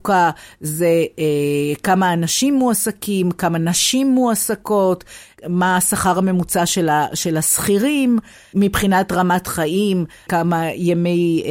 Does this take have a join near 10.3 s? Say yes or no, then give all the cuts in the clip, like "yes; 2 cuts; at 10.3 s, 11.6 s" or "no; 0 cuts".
yes; 1 cut; at 10.3 s